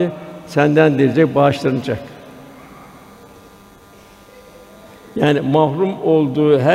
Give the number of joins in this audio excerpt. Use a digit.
0